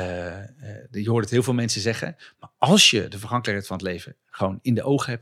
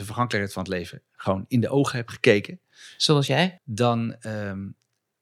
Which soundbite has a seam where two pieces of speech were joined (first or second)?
second